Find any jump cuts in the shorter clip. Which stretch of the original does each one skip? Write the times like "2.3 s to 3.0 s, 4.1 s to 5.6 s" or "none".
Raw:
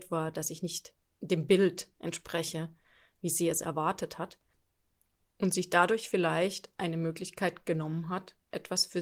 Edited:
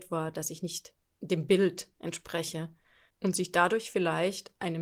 3.1 s to 5.3 s